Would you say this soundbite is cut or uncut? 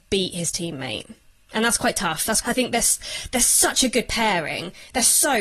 cut